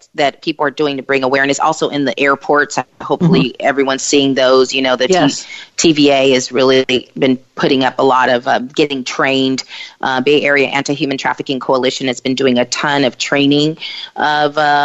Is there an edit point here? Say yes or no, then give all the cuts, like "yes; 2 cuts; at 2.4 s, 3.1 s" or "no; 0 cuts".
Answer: no; 0 cuts